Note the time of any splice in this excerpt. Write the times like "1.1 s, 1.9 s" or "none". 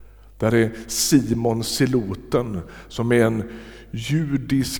none